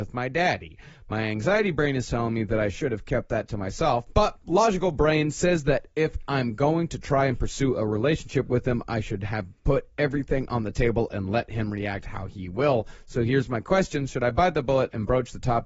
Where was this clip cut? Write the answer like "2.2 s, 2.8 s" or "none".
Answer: none